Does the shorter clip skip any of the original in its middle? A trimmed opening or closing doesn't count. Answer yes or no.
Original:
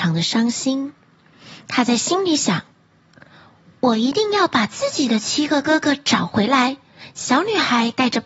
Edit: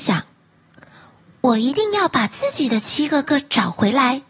yes